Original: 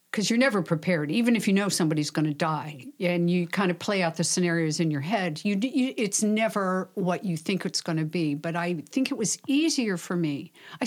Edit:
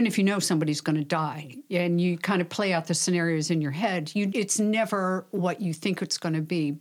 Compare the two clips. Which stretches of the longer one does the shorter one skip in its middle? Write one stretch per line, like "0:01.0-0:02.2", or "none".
0:05.6-0:05.9